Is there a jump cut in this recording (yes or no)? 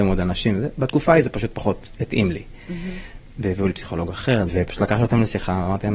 yes